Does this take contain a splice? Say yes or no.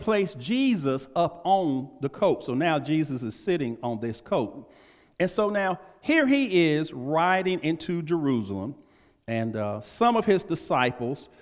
no